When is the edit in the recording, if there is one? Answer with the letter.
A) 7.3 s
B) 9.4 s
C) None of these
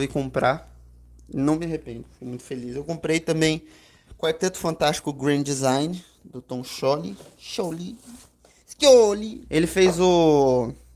B